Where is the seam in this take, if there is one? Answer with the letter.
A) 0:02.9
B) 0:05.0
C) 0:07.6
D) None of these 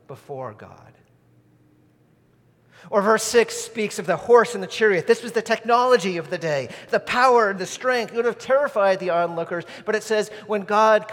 C